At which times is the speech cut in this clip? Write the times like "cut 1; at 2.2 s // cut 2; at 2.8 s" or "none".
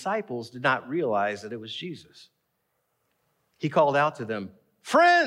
none

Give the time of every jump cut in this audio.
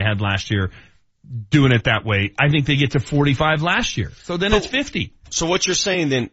none

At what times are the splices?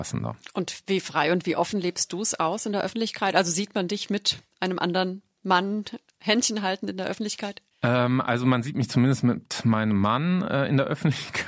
cut 1; at 7.7 s

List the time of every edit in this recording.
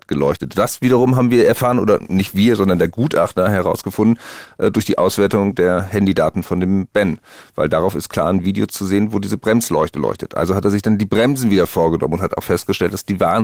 none

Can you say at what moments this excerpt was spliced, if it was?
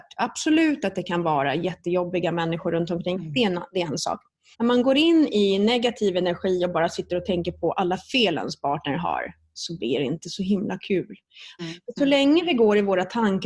cut 1; at 3.1 s // cut 2; at 4.5 s // cut 3; at 11.6 s

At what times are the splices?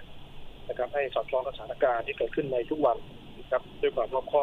none

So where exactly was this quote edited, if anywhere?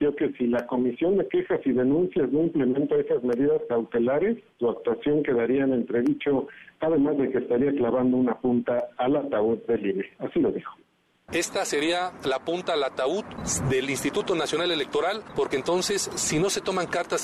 none

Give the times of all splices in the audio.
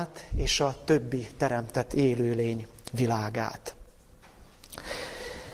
none

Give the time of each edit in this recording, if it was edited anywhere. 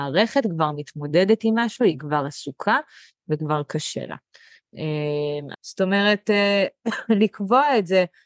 cut 1; at 5.5 s

